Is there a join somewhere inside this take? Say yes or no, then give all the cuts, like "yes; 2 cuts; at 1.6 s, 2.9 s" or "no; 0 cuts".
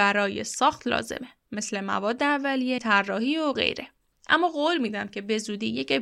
yes; 2 cuts; at 2.8 s, 4.1 s